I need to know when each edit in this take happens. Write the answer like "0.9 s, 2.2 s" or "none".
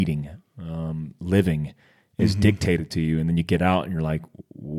none